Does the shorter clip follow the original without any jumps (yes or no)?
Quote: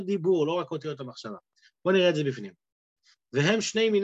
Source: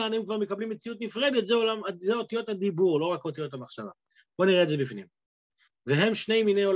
yes